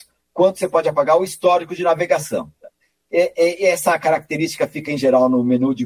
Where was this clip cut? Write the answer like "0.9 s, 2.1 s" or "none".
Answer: none